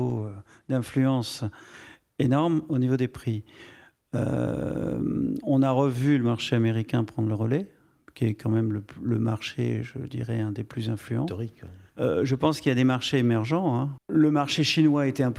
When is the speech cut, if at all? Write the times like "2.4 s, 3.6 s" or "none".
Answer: 11.9 s, 14.0 s